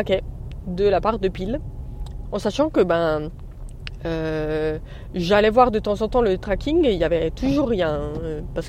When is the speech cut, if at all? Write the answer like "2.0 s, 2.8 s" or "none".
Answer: 2.3 s